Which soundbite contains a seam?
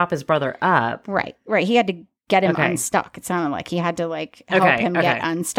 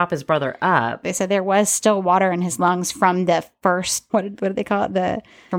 second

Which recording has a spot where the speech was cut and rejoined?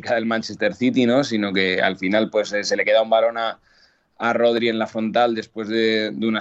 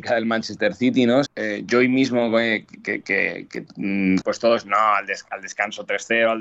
second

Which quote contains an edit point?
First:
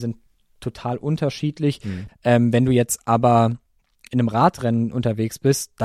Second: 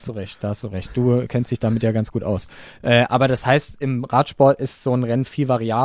first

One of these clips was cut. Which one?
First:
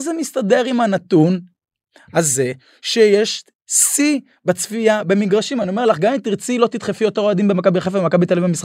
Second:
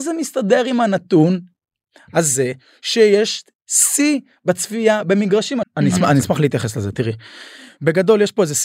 second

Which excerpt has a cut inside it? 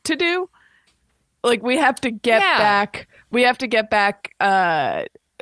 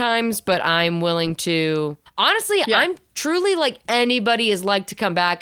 second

